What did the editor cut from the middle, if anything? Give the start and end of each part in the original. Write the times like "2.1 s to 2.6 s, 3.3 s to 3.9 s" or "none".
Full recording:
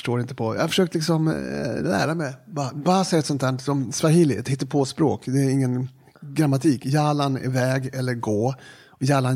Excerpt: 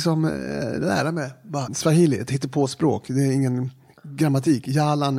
2.7 s to 3.9 s